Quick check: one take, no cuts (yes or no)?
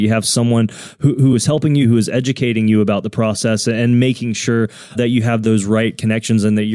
no